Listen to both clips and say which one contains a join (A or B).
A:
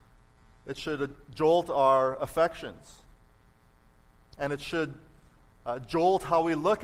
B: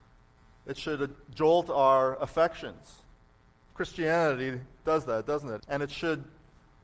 B